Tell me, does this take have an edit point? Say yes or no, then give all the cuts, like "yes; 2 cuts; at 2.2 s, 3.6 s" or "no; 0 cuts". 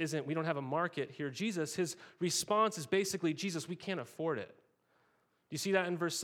no; 0 cuts